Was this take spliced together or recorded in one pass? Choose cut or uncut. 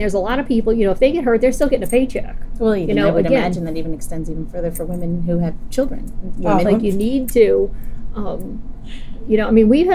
cut